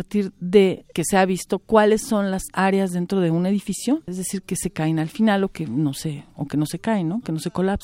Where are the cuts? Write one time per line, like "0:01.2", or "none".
0:04.1

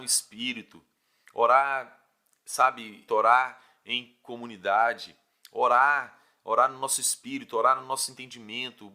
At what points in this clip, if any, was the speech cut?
0:03.1

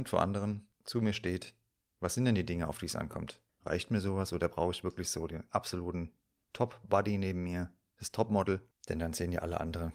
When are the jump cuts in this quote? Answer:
0:03.6

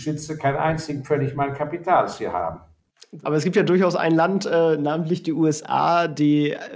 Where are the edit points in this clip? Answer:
0:03.2

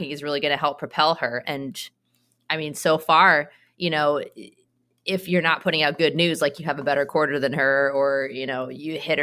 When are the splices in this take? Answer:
0:01.4

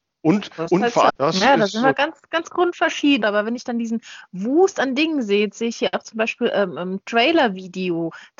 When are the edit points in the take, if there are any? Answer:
0:01.1
0:03.2

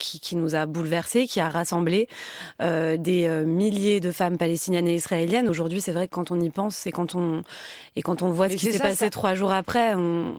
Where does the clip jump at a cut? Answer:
none

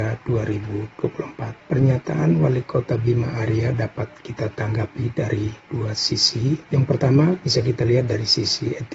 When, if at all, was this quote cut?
none

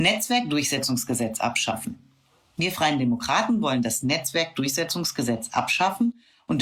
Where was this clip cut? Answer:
none

